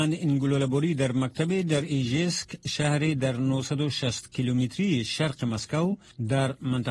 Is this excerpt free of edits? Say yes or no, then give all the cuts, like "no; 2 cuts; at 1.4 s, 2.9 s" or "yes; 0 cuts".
yes; 0 cuts